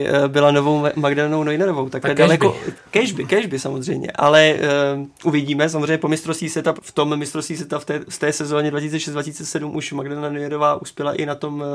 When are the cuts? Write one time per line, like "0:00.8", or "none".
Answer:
0:06.8